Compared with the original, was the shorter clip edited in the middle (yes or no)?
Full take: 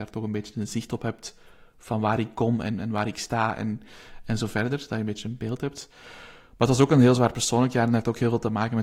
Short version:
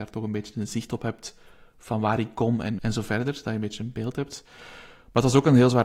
yes